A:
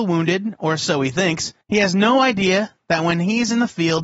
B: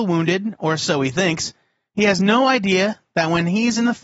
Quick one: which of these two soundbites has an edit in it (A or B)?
A